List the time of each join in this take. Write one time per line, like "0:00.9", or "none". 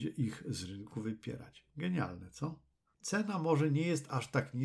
0:02.9